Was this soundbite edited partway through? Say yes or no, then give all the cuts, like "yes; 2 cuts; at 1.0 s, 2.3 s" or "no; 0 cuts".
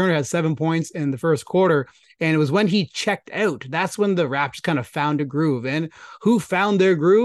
no; 0 cuts